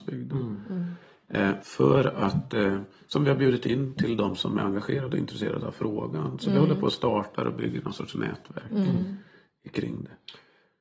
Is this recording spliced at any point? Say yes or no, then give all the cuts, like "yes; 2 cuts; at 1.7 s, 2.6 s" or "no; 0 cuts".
yes; 1 cut; at 1.6 s